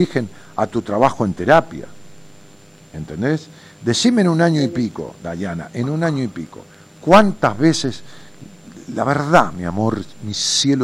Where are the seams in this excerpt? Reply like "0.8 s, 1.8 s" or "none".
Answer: none